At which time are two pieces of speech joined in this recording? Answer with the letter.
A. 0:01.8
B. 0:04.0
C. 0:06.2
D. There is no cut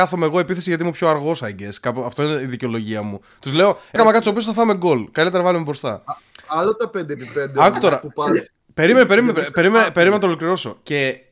B